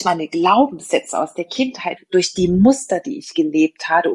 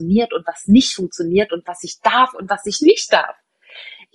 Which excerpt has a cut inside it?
first; 1 cut; at 2.0 s

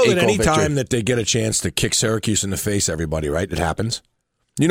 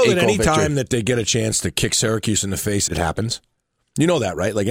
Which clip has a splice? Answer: second; 1 cut; at 2.9 s

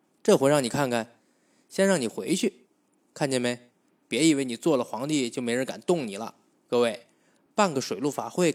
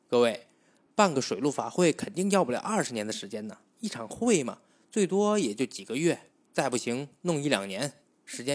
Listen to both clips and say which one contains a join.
first; 2 cuts; at 3.0 s, 6.5 s

